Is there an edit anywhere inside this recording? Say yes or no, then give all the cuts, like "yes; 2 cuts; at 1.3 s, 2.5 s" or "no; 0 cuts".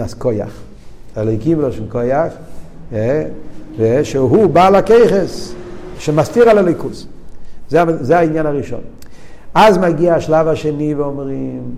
yes; 2 cuts; at 1.1 s, 6.0 s